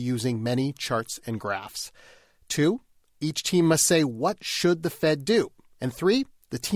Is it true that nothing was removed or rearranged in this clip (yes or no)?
no